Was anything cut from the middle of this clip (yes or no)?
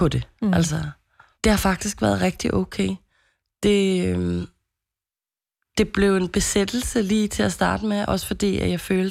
yes